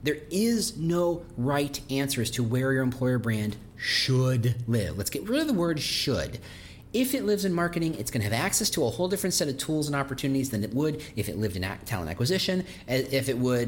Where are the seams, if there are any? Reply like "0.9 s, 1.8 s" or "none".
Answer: none